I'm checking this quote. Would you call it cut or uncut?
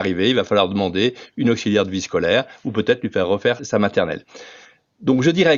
cut